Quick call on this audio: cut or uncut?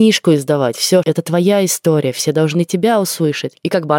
cut